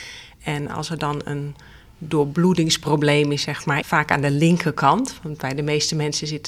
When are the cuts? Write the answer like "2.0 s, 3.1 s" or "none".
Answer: 3.8 s